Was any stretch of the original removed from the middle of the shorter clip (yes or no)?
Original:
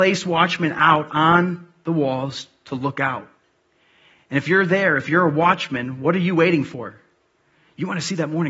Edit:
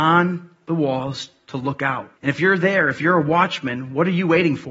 yes